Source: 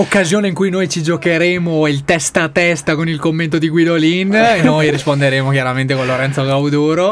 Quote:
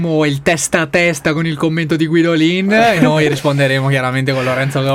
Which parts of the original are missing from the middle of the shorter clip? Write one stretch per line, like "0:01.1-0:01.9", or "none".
none

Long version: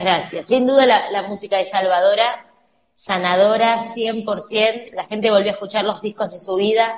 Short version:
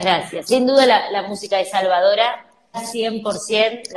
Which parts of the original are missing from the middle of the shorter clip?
0:02.7-0:03.8

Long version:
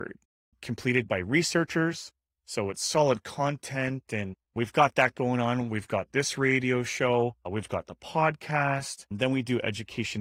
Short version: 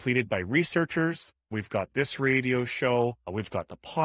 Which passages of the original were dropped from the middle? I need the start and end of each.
0:02.3-0:05.7

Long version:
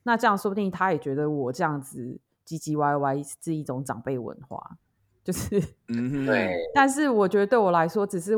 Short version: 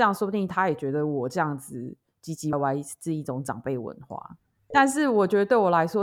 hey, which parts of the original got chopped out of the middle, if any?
0:02.8-0:02.9
0:05.1-0:06.7

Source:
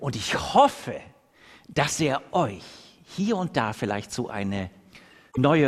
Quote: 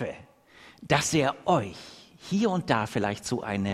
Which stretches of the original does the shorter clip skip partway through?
none

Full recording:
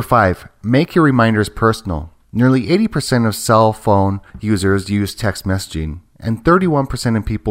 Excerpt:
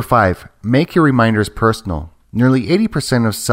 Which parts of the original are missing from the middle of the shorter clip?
none

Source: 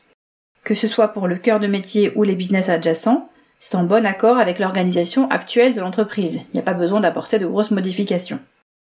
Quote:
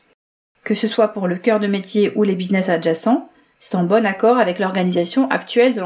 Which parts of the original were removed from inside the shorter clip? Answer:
none

